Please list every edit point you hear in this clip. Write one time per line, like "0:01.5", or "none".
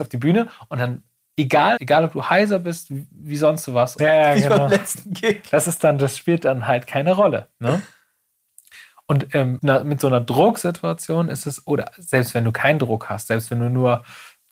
0:01.8
0:04.0
0:09.6